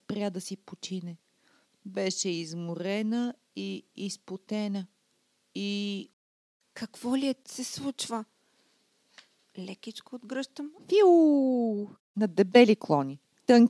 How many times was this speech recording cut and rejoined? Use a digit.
2